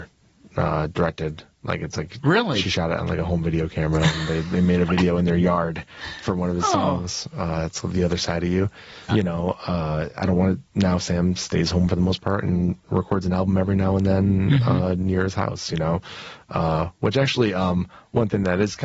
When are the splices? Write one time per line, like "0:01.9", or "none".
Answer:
0:09.1